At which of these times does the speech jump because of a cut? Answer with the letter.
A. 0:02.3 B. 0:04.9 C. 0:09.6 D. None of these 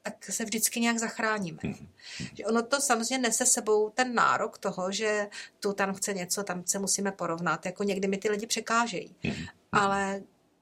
D